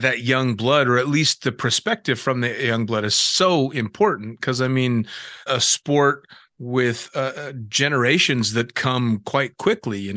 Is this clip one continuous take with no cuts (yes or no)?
no